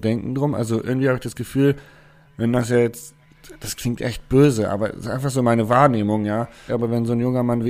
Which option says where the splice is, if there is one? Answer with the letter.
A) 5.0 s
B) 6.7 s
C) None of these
B